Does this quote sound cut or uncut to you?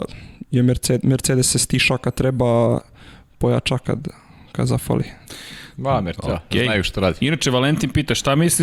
uncut